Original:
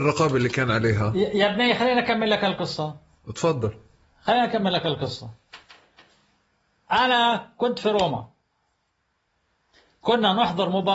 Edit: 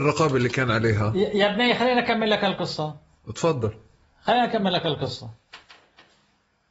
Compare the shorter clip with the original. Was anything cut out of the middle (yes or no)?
no